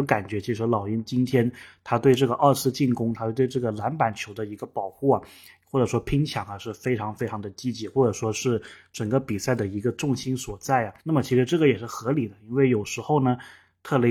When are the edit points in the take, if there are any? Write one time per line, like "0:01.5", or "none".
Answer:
0:11.0